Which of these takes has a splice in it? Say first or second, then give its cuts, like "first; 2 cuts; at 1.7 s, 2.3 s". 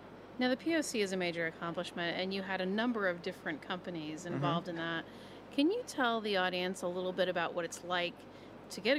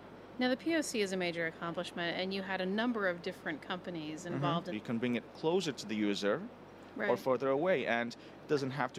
second; 1 cut; at 4.7 s